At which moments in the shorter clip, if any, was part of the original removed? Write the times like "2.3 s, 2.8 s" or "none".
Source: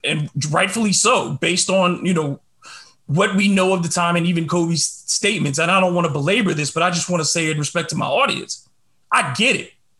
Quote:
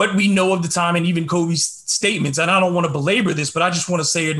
none